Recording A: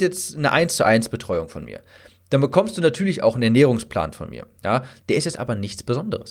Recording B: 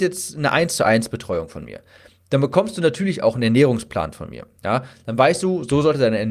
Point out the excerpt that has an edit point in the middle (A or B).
A